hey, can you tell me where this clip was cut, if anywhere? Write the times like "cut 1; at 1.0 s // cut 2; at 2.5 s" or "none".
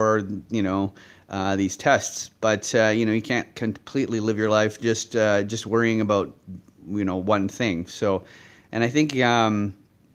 none